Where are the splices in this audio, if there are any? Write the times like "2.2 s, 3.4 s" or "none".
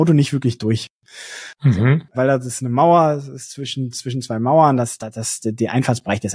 2.1 s